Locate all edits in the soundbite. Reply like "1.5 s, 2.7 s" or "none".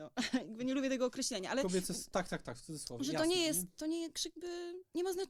none